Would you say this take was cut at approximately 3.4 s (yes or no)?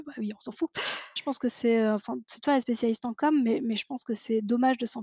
no